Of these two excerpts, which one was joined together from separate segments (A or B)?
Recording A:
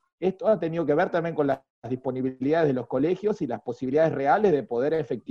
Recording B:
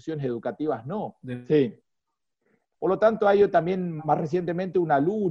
B